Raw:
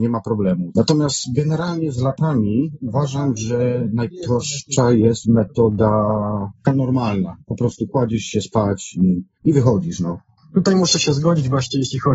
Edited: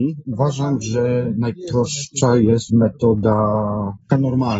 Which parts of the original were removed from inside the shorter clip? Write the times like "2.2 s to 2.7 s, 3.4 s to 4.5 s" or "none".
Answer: none